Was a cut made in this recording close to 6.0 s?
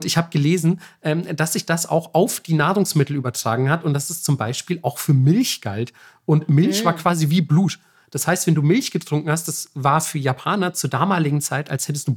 no; 0 cuts

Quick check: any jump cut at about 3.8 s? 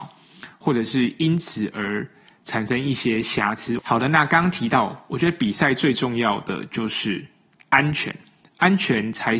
yes; 1 cut; at 3.8 s

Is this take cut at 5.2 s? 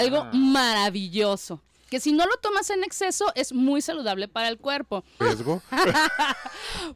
yes; 1 cut; at 5.2 s

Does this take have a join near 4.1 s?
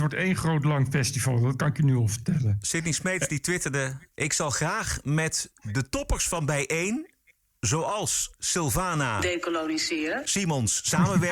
yes; 1 cut; at 4.1 s

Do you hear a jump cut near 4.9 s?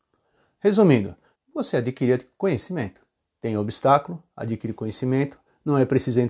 no; 2 cuts; at 1.3 s, 3.2 s

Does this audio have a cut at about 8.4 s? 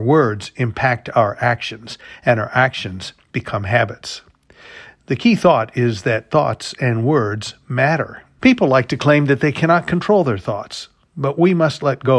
yes; 1 cut; at 8.4 s

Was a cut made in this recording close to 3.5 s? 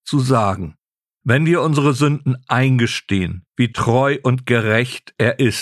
yes; 1 cut; at 3.5 s

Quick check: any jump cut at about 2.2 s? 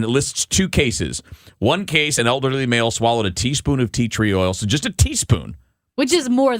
no; 0 cuts

